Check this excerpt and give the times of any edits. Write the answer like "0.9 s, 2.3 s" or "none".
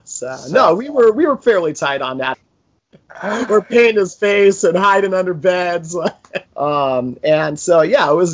2.3 s, 6.5 s